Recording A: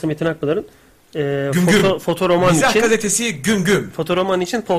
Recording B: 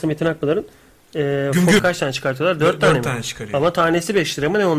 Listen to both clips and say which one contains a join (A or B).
B